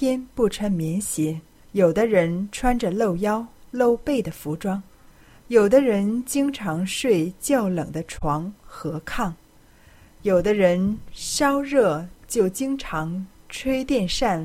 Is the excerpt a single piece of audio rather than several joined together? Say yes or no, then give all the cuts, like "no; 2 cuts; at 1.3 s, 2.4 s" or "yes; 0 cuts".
no; 1 cut; at 1.6 s